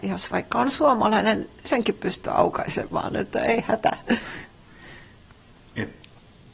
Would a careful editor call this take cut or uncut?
uncut